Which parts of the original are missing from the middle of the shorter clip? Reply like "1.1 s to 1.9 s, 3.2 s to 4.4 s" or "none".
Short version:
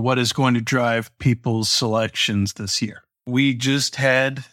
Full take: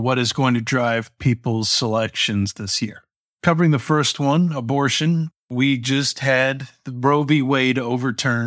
3.2 s to 5.4 s